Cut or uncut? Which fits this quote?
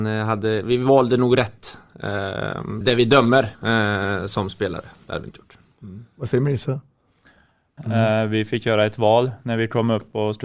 cut